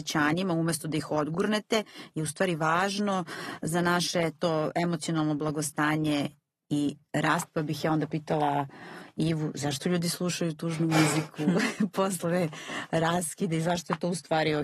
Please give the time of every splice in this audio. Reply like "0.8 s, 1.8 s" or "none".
none